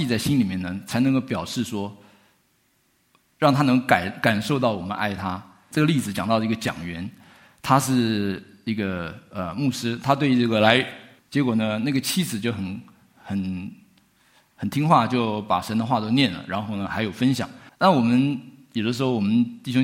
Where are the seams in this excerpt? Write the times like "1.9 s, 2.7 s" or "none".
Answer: 5.7 s, 11.2 s, 17.7 s